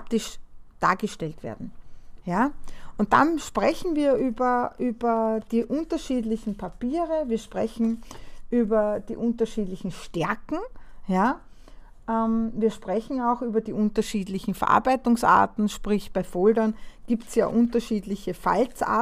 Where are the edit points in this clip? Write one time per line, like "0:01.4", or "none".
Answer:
none